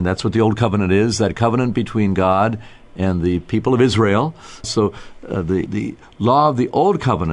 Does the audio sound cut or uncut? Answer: cut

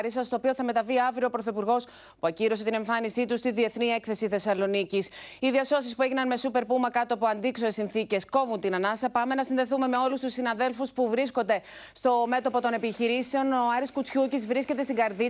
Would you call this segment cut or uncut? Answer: uncut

